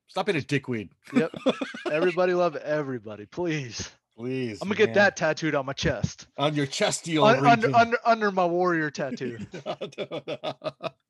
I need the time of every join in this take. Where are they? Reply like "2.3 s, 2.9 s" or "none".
none